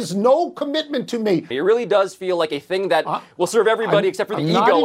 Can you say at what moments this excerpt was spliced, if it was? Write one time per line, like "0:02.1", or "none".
0:01.5